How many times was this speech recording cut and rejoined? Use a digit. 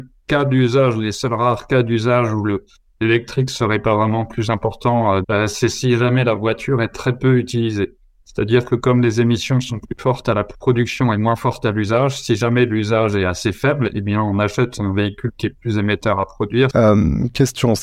2